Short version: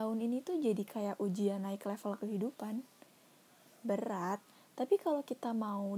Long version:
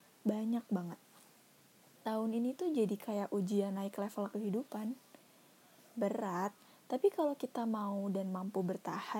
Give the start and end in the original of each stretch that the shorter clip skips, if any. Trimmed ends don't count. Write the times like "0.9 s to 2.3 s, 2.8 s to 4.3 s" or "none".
none